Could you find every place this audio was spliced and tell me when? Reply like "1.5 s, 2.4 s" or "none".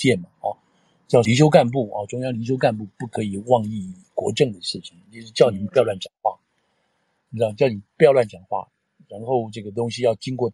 none

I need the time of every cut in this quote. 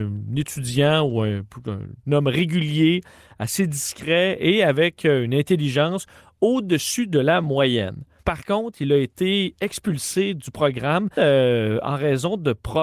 8.2 s, 11.2 s

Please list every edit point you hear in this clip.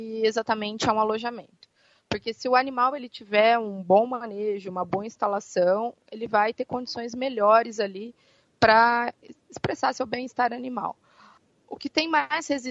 none

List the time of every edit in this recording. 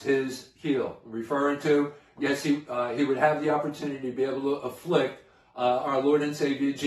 none

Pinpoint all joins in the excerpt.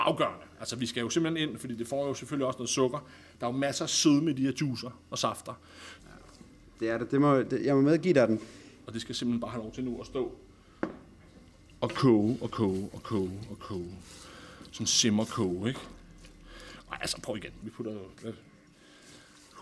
6.0 s, 8.8 s, 17.6 s

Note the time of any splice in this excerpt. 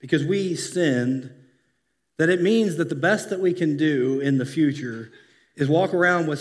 none

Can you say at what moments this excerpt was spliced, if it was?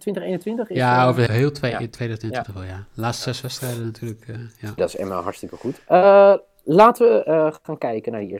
1.3 s, 4.8 s

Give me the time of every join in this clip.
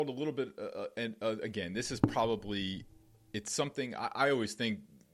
none

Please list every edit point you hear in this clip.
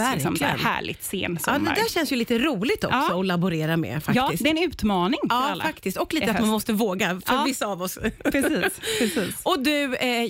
none

